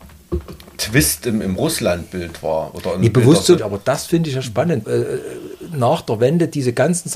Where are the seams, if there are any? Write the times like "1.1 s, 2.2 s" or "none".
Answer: 3.6 s, 4.8 s